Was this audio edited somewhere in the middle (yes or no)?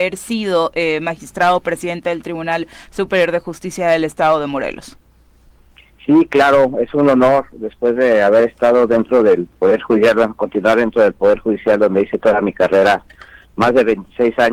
no